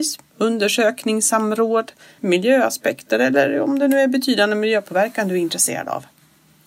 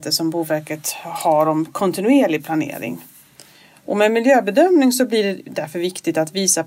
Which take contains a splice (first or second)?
first